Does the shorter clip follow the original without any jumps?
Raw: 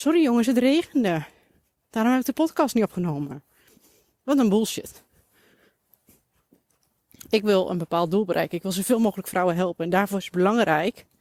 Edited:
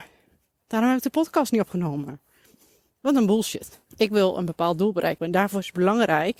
no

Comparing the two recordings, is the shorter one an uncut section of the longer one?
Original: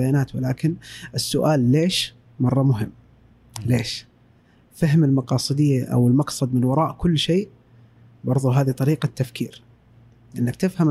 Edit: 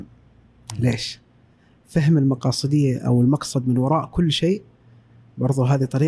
yes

